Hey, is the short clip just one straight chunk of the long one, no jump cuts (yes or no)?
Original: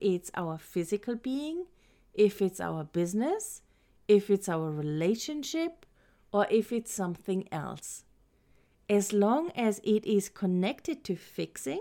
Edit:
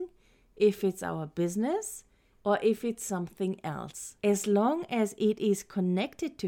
no